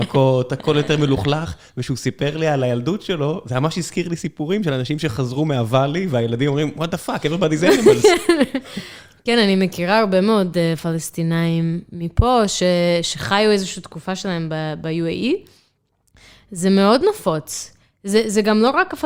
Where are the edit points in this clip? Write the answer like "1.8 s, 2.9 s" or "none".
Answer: none